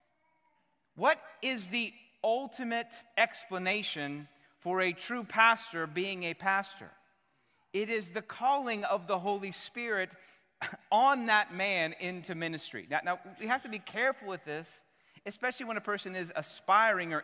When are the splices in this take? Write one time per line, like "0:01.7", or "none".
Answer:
none